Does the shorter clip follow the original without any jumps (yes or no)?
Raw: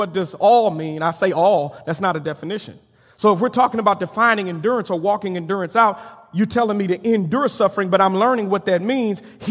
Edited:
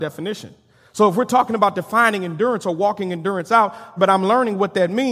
no